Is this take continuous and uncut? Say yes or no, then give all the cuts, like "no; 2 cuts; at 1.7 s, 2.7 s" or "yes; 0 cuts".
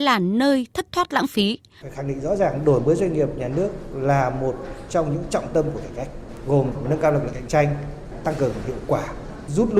no; 1 cut; at 1.8 s